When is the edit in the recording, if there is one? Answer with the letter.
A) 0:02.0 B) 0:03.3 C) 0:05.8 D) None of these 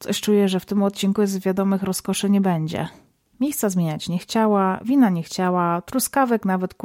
B